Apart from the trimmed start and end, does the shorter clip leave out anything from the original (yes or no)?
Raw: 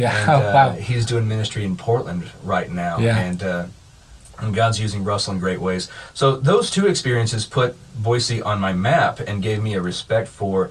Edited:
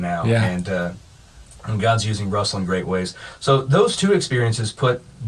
no